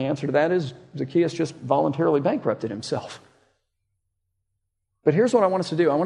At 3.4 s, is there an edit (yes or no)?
no